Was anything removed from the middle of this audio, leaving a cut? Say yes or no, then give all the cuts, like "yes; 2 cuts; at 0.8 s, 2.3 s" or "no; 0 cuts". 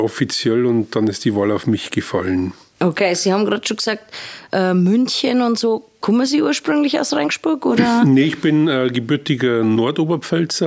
no; 0 cuts